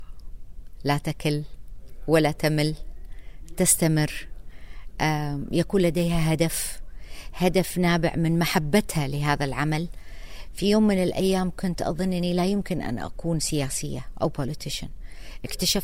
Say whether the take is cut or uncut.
uncut